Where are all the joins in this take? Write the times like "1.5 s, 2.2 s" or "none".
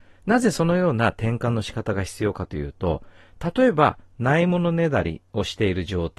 none